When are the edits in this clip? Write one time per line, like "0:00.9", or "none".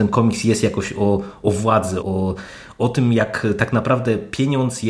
0:02.0